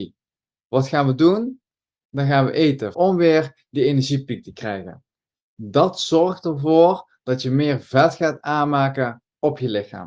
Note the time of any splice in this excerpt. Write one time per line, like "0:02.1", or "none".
0:02.9